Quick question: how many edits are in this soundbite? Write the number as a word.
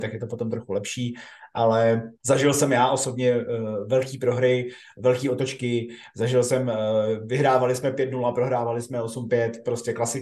one